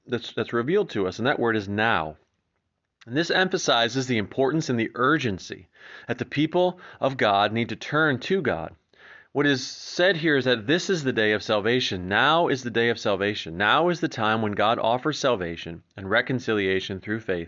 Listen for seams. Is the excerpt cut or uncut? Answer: uncut